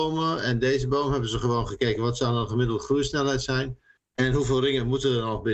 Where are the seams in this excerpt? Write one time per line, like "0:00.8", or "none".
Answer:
none